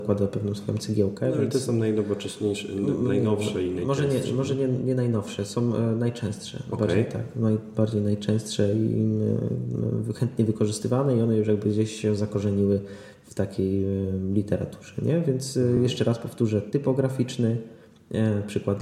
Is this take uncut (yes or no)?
yes